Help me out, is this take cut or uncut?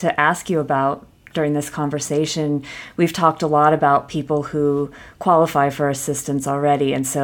uncut